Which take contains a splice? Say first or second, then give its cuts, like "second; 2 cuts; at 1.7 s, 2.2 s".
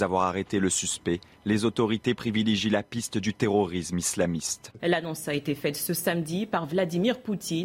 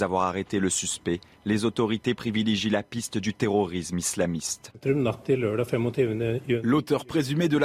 first; 1 cut; at 4.8 s